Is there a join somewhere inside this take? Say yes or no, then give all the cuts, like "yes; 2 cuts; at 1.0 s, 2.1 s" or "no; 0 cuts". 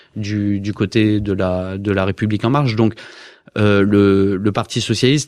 no; 0 cuts